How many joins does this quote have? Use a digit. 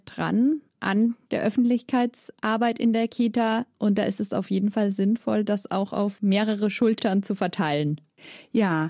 0